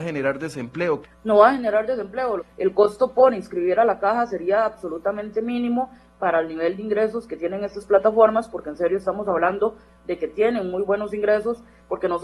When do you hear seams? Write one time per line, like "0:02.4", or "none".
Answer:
0:01.0
0:02.4